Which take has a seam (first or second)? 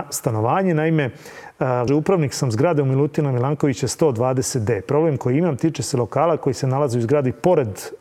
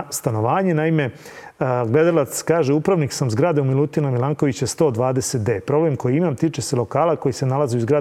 first